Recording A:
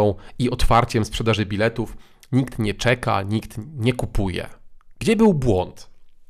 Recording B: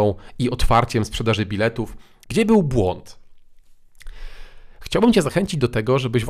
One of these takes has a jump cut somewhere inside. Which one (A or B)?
B